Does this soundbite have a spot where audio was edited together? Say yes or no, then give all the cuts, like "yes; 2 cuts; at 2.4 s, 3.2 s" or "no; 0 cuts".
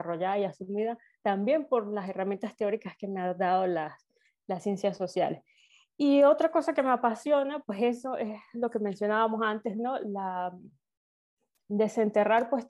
no; 0 cuts